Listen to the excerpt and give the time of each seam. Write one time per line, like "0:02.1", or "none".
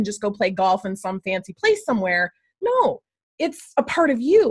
none